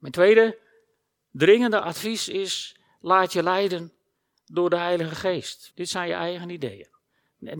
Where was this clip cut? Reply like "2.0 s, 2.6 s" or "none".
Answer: 5.7 s